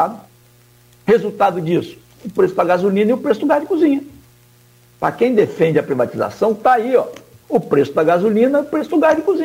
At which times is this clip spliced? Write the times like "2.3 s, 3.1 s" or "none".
4.9 s